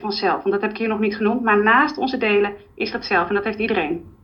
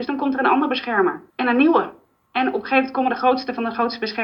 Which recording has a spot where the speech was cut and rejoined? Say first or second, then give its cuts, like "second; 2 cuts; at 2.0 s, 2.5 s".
second; 1 cut; at 1.3 s